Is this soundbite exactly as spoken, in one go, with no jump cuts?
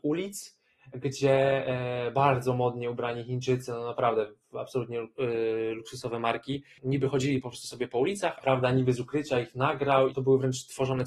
no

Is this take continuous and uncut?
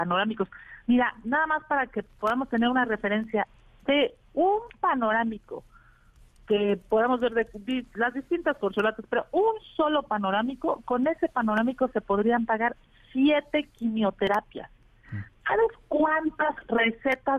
yes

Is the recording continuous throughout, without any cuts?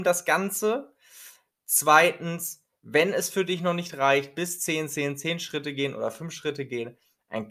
yes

